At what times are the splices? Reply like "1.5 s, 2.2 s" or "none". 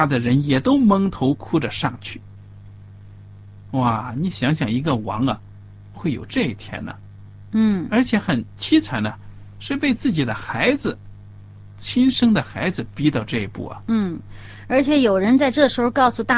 5.9 s